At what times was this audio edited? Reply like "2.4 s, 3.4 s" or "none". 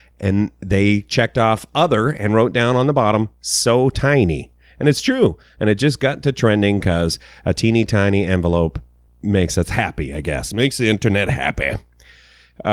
none